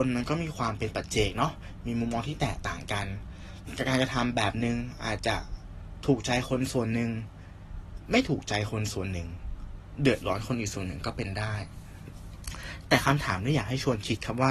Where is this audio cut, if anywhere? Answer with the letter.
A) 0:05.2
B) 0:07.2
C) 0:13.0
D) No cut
A